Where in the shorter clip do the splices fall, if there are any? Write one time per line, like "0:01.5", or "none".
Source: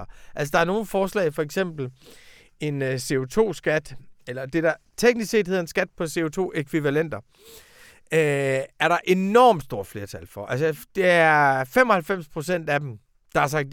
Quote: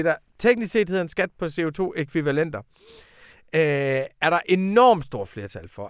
none